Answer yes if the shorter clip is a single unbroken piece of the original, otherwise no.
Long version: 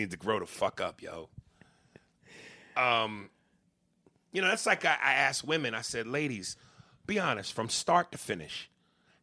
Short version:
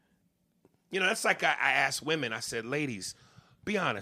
yes